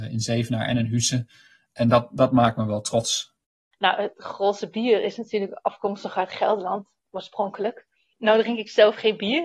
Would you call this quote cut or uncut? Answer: uncut